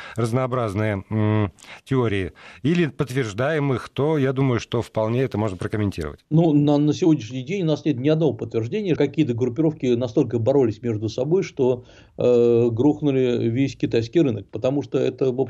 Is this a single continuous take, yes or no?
no